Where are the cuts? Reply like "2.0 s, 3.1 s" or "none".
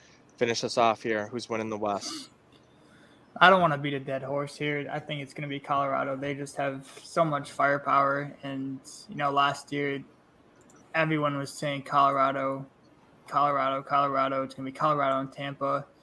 none